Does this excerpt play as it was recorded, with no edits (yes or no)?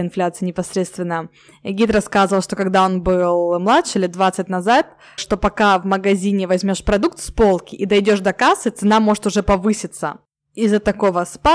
no